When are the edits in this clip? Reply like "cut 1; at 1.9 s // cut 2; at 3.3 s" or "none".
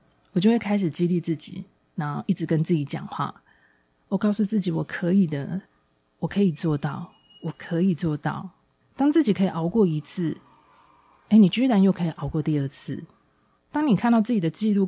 cut 1; at 8.8 s // cut 2; at 13.6 s